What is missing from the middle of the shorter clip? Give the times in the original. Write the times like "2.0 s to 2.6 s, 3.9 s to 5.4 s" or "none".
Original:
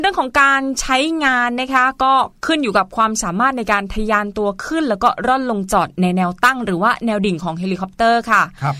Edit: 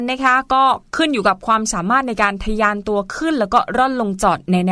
none

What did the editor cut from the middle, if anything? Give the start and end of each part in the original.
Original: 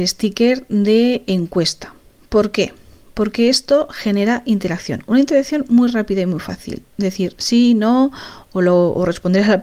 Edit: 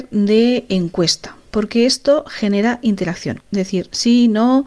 2.1 s to 3.1 s, 5.0 s to 6.9 s

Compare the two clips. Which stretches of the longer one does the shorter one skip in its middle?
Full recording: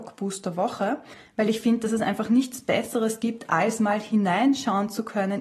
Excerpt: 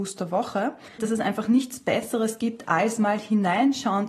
1.2 s to 1.8 s

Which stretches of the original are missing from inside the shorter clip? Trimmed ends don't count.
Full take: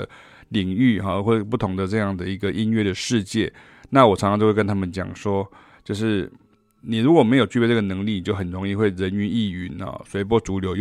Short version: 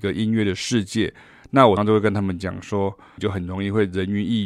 4.2 s to 4.3 s, 5.7 s to 8.2 s

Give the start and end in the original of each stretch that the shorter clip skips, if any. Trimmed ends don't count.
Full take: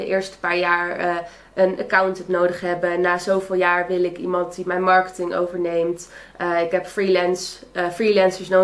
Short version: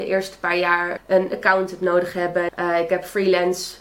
1.0 s to 1.4 s, 3.0 s to 6.3 s

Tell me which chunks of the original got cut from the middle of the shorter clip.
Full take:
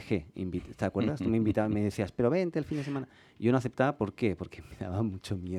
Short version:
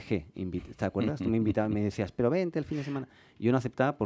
none

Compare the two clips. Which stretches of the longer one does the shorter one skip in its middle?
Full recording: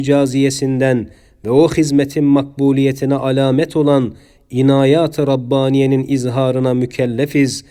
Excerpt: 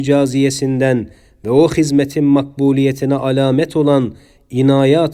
none

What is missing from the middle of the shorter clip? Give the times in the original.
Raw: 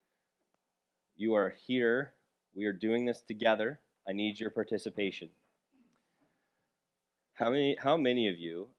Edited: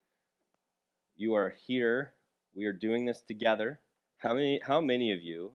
4.0 s to 7.2 s

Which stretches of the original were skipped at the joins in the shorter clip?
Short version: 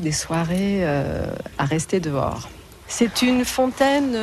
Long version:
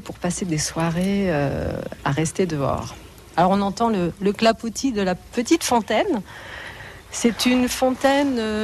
3.3 s to 7.0 s

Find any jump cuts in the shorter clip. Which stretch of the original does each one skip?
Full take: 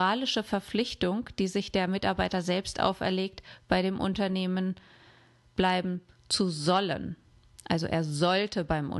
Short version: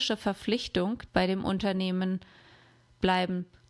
1.3 s to 3.6 s

